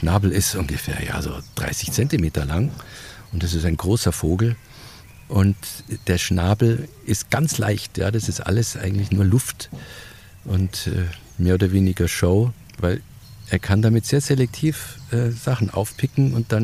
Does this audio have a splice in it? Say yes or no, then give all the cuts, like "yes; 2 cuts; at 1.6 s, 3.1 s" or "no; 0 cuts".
no; 0 cuts